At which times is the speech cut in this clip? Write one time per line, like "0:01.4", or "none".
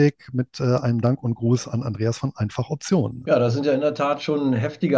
0:03.2

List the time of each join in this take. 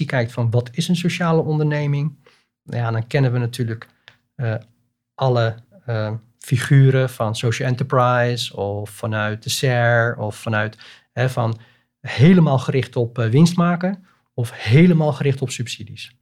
none

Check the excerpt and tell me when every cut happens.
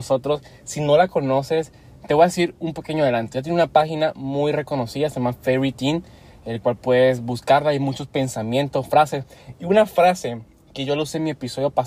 none

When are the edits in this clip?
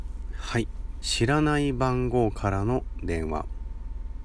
0:01.0

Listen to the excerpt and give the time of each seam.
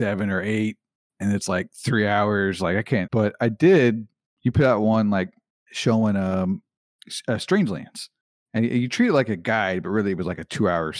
0:03.1

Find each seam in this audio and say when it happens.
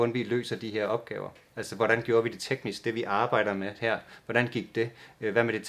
none

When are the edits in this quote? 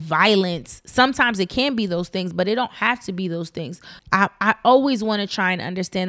0:04.0

